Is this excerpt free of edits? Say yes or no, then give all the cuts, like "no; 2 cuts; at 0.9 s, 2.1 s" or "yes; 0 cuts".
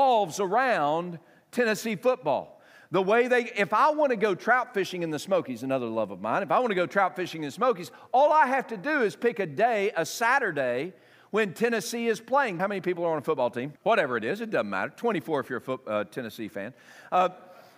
no; 2 cuts; at 12.6 s, 13.8 s